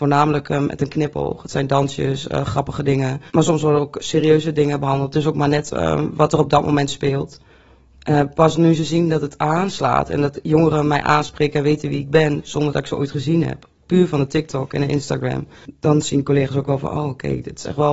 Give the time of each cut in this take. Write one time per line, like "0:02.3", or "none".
0:03.3
0:08.0